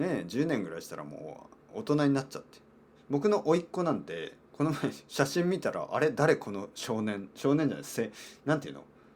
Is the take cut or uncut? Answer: cut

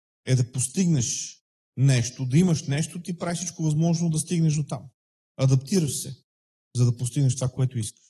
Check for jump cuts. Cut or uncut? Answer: uncut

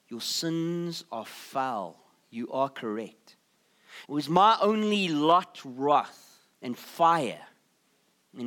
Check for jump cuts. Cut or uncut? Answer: cut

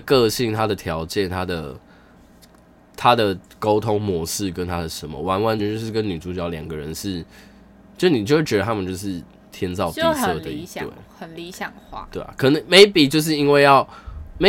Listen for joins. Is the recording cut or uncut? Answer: cut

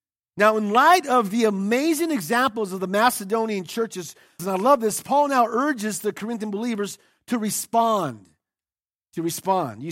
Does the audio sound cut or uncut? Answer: cut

